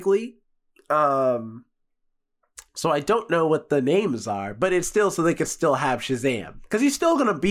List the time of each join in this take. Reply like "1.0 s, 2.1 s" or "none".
none